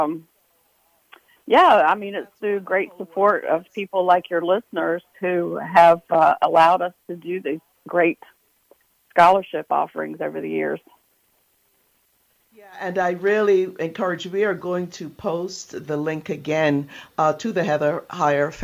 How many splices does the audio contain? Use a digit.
0